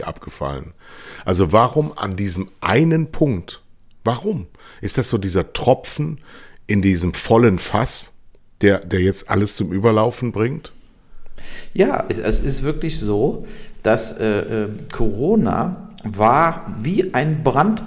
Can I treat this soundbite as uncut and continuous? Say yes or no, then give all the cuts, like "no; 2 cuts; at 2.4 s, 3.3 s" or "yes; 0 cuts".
yes; 0 cuts